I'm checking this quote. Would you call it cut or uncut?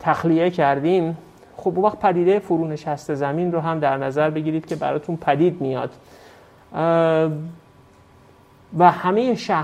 uncut